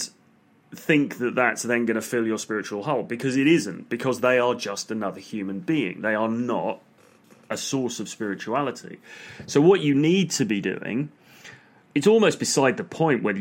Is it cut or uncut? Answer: uncut